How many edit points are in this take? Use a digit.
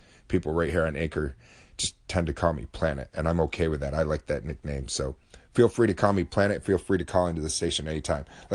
0